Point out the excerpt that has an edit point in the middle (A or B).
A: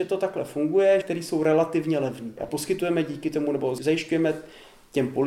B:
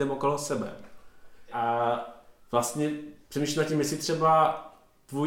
A